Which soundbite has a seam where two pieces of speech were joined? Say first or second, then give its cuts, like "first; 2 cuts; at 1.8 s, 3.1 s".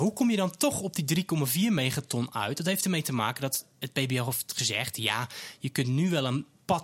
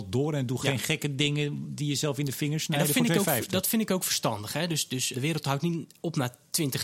second; 1 cut; at 5.1 s